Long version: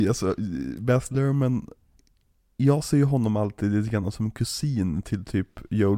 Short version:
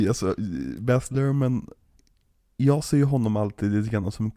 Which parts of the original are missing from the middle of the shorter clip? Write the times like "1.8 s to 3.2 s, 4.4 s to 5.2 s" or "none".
none